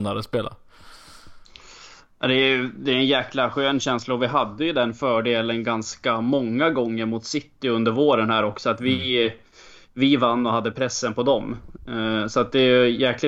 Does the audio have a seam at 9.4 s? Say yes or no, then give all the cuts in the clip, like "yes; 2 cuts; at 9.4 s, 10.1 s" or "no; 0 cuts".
no; 0 cuts